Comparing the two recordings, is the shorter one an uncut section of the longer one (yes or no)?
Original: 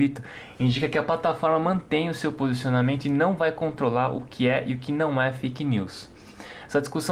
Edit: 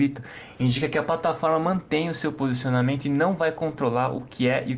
yes